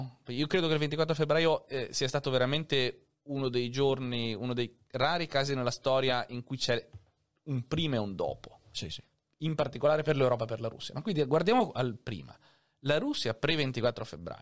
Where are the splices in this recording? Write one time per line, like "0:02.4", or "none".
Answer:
none